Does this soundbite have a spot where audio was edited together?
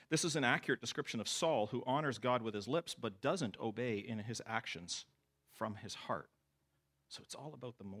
no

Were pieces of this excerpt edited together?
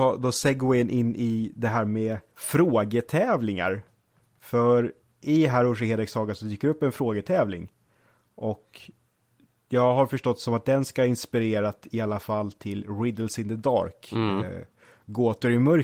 yes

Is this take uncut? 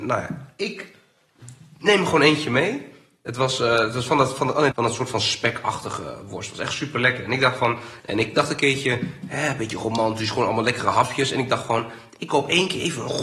no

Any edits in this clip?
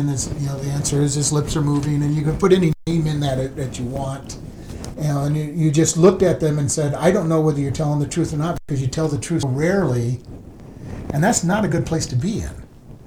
yes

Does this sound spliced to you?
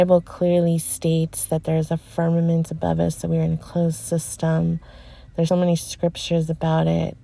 yes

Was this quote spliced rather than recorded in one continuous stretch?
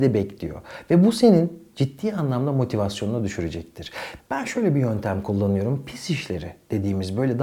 yes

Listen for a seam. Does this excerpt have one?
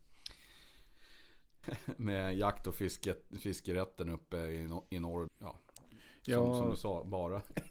yes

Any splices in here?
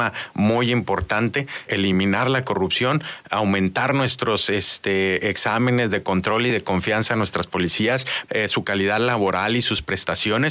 yes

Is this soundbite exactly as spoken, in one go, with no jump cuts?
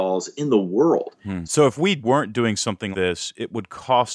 no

